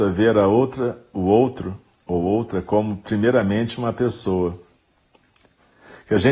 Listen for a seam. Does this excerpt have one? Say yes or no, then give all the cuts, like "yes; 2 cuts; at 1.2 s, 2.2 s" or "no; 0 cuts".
no; 0 cuts